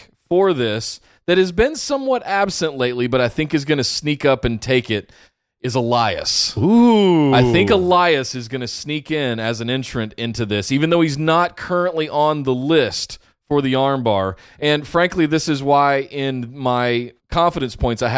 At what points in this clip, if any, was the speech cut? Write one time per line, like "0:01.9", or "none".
0:17.2